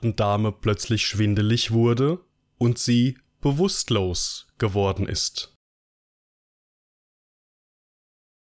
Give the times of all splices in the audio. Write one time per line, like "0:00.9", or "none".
none